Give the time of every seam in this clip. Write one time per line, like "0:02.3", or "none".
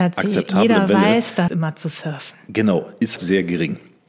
0:01.5
0:03.2